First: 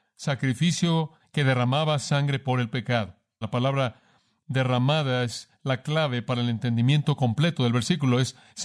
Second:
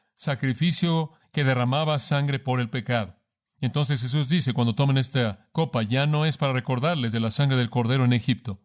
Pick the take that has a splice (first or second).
first